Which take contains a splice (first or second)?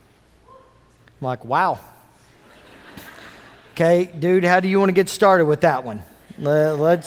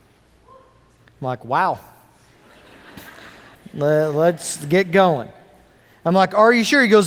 second